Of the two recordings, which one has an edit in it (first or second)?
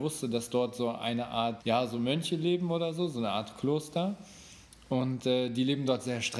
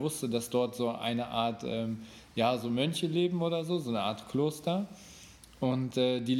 first